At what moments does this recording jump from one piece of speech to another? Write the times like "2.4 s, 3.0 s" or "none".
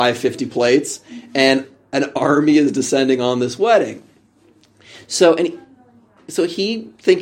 none